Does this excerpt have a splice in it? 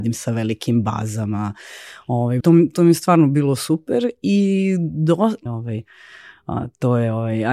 yes; 2 cuts; at 2.4 s, 5.5 s

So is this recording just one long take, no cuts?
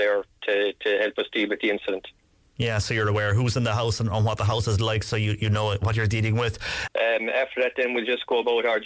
no; 1 cut; at 6.9 s

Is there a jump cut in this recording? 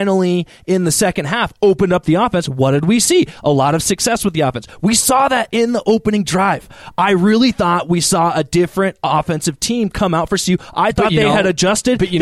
no; 0 cuts

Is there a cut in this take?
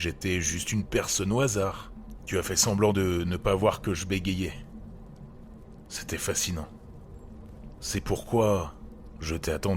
yes; 1 cut; at 2.2 s

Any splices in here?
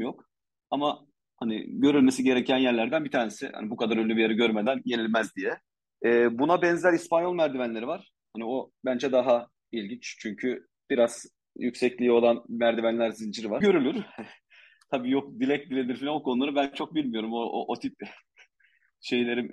yes; 1 cut; at 13.6 s

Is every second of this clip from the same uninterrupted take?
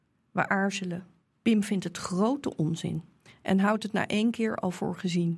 no; 1 cut; at 1.3 s

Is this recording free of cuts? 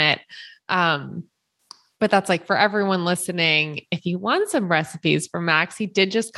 yes; 0 cuts

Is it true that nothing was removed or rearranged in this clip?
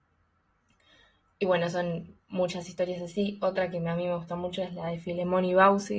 yes; 0 cuts

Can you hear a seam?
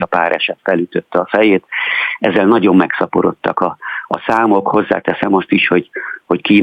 no; 0 cuts

